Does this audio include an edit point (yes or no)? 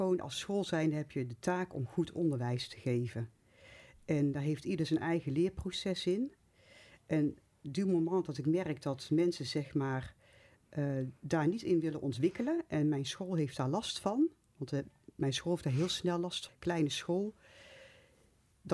yes